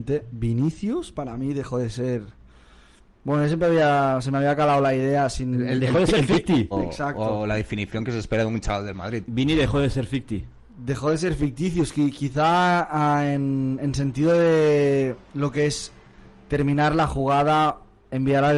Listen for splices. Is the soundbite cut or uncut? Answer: cut